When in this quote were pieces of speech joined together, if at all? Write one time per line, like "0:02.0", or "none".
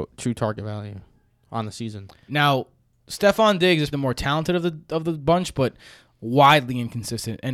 0:02.3
0:03.9